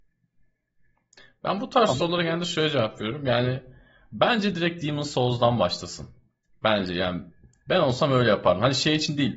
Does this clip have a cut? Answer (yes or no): no